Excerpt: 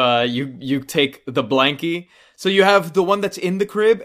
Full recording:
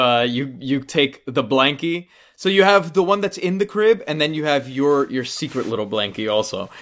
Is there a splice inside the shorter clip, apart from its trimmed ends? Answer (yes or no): no